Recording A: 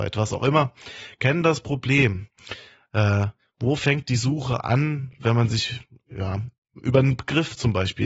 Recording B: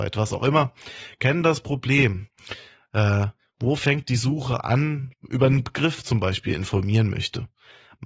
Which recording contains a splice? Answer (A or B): B